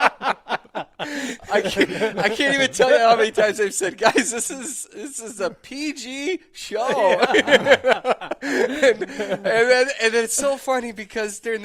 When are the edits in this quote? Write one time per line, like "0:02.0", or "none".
none